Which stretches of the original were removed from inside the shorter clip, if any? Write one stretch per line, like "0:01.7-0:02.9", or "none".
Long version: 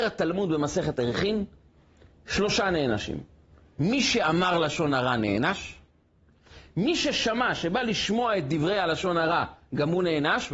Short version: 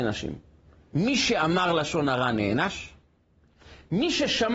none